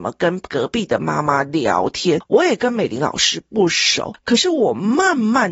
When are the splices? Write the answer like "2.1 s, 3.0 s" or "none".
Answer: none